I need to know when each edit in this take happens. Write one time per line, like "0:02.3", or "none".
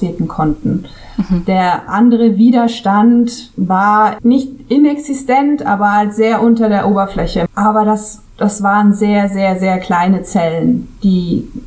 0:07.5